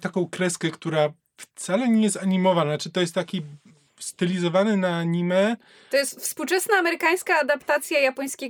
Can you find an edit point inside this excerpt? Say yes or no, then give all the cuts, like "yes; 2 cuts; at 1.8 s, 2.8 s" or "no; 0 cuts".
no; 0 cuts